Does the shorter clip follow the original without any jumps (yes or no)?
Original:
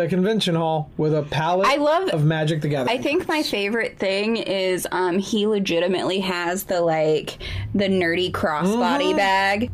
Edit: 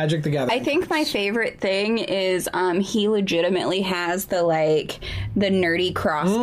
yes